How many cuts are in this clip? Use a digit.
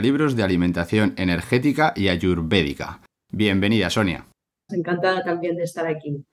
1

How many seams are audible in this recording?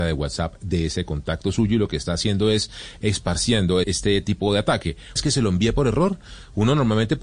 2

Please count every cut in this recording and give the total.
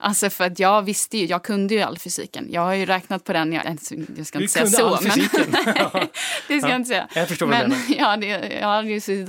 1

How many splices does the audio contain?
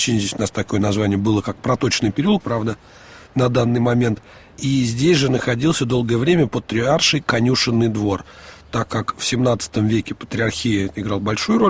2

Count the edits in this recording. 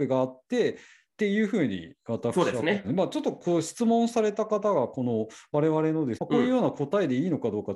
2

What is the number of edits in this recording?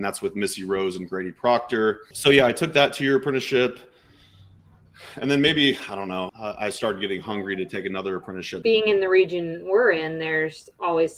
3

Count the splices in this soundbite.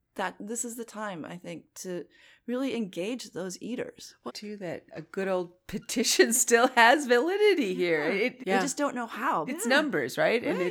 3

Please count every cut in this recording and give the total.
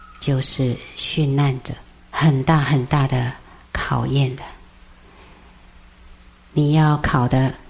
1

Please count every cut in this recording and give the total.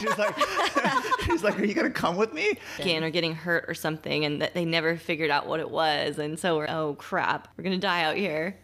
2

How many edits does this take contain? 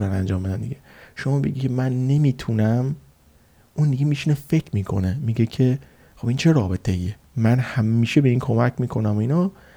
1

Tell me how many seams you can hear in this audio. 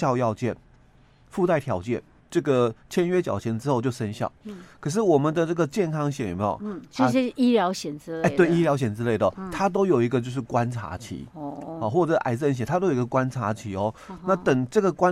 1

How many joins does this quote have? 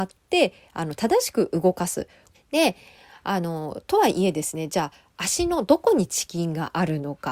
1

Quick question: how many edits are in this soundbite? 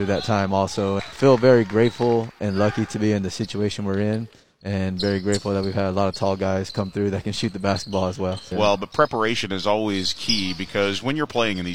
2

